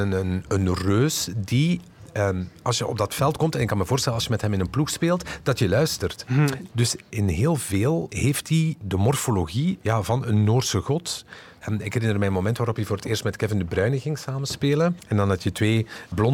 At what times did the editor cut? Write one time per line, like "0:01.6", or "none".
0:06.2